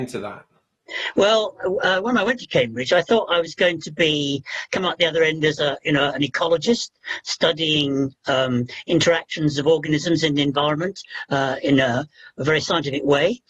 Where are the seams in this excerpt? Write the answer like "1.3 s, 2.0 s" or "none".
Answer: none